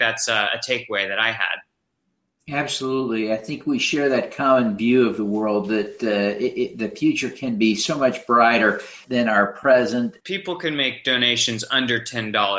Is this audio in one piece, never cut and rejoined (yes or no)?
no